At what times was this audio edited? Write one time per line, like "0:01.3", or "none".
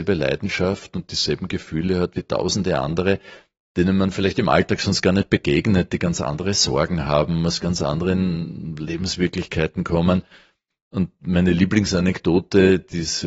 none